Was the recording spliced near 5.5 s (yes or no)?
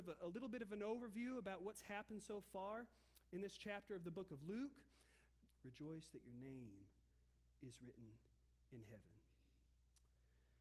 yes